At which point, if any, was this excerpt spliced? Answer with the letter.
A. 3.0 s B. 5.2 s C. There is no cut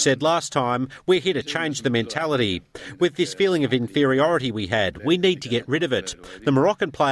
C